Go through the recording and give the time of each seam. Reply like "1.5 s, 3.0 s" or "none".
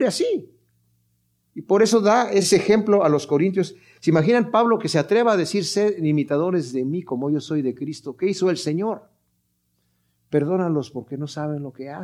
none